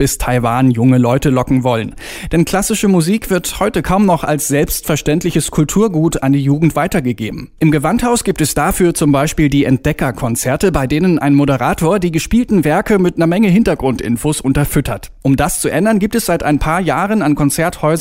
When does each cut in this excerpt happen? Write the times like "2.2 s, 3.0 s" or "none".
7.6 s, 15.2 s